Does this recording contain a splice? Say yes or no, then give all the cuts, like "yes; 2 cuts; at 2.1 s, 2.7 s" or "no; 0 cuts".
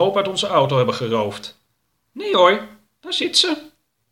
no; 0 cuts